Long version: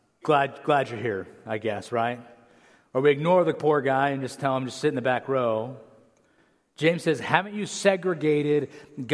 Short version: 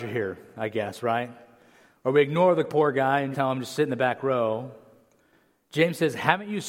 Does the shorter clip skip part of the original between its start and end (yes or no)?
yes